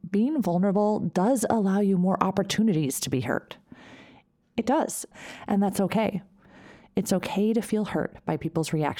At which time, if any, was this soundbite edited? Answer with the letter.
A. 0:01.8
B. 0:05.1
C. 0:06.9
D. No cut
B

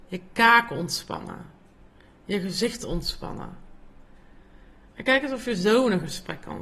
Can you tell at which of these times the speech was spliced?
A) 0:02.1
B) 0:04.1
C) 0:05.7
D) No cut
D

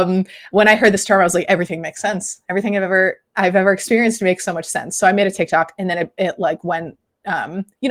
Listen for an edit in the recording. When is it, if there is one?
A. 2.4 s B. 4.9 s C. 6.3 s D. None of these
D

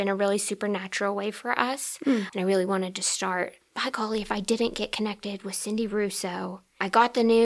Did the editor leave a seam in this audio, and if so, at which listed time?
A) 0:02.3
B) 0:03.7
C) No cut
A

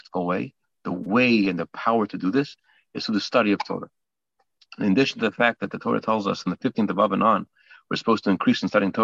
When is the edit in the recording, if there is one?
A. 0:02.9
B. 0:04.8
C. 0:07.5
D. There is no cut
D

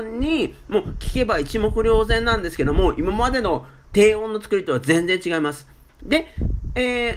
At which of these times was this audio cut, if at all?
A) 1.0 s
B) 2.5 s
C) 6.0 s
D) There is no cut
C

